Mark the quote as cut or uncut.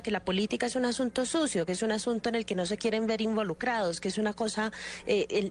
uncut